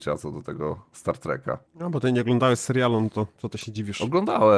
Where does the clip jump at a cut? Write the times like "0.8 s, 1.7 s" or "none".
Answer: 1.7 s